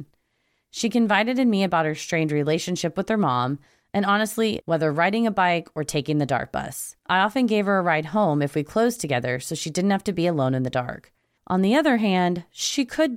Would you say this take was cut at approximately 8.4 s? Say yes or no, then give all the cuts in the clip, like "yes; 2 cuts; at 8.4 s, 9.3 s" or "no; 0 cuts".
no; 3 cuts; at 4.6 s, 7.0 s, 11.4 s